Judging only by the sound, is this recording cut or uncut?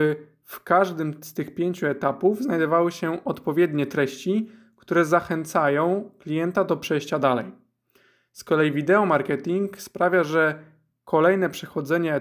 uncut